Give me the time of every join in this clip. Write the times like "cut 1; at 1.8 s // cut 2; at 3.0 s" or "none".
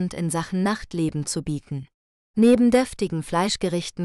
cut 1; at 2.2 s